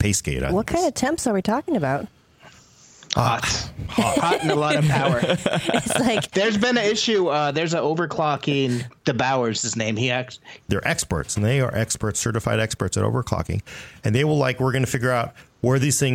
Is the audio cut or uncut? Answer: cut